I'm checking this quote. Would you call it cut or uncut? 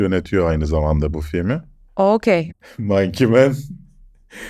cut